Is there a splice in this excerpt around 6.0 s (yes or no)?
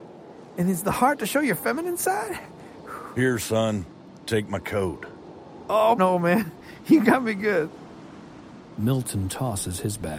yes